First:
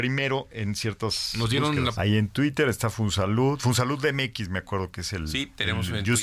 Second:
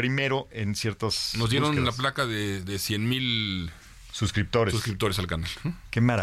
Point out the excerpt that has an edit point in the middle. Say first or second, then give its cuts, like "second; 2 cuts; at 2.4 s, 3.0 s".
first; 1 cut; at 1.9 s